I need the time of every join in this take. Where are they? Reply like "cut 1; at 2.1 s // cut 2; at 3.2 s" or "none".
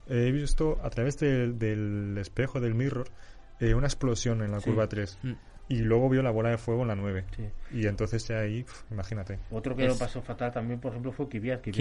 none